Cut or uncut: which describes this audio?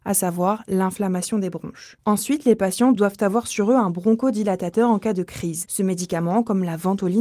uncut